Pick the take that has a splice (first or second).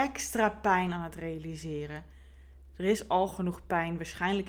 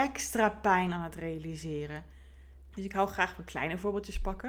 second